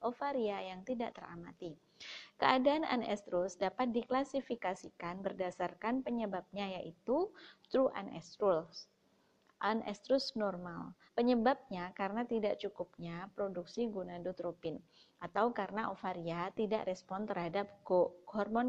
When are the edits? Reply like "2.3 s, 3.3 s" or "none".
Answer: 11.1 s